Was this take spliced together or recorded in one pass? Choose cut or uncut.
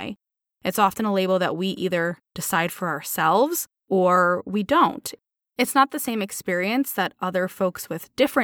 cut